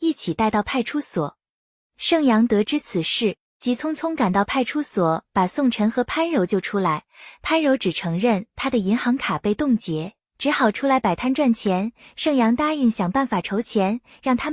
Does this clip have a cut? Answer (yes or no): no